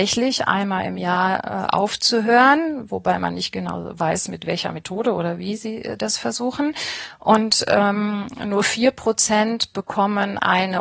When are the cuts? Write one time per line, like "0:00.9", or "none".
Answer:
none